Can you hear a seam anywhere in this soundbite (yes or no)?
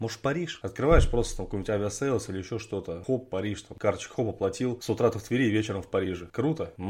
no